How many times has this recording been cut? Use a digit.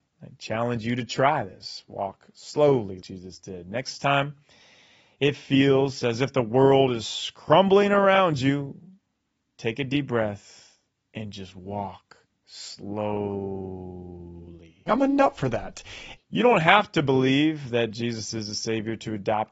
3